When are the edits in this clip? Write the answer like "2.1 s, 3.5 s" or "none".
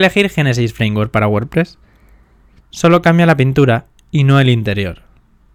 2.6 s

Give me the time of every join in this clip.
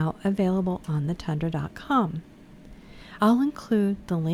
3.2 s

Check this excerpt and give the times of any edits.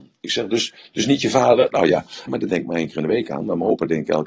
2.3 s

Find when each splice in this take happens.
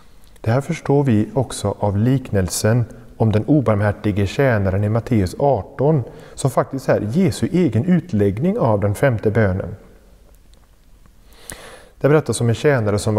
none

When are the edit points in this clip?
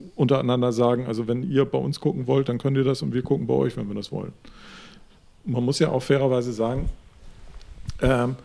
none

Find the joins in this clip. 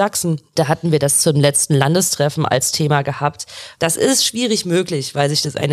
3.8 s

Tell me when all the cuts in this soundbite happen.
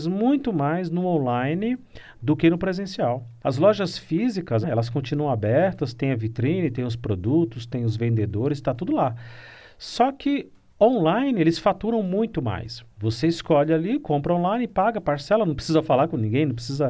3.4 s, 4.6 s, 12.9 s

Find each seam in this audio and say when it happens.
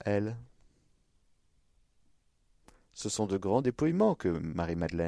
none

